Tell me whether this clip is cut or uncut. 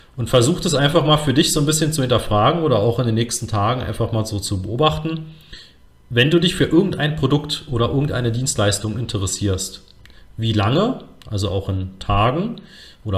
uncut